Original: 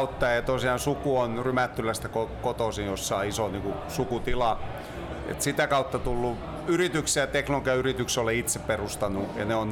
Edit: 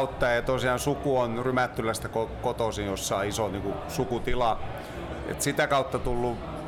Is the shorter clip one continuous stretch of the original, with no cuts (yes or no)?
yes